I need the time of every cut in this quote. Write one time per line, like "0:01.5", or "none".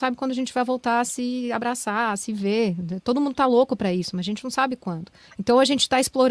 0:05.3